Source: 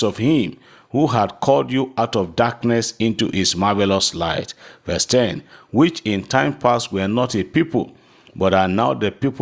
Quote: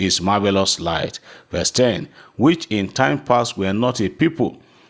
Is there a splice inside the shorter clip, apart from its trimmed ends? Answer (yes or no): no